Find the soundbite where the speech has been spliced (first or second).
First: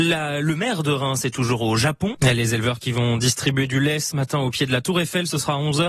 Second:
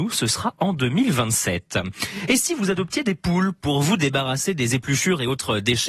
first